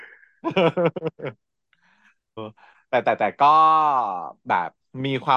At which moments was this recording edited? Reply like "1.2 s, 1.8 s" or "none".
2.4 s